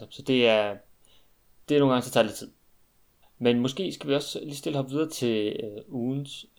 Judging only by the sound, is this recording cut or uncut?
cut